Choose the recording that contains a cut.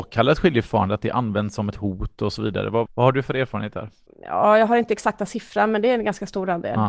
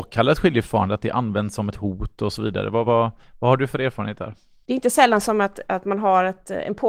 first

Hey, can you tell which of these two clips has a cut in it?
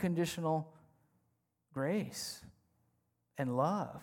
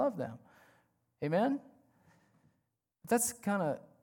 second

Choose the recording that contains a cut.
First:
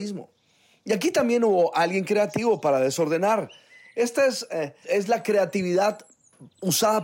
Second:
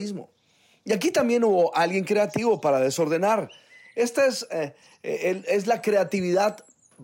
first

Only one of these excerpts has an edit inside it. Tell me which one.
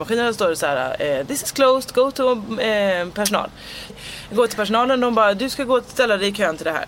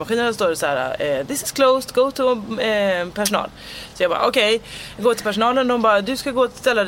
first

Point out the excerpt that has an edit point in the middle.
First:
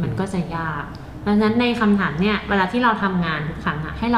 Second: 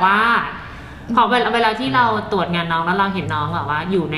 second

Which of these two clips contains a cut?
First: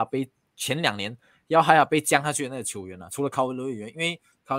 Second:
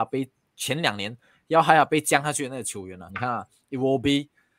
second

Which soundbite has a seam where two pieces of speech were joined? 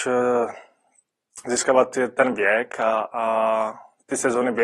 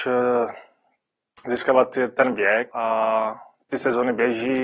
second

